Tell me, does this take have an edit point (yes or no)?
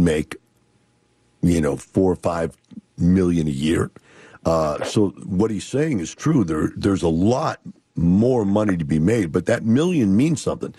no